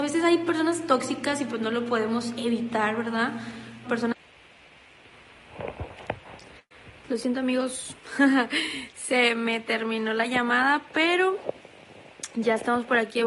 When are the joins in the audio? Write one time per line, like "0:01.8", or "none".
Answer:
0:03.8